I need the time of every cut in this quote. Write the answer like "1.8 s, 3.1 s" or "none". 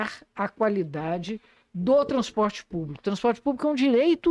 none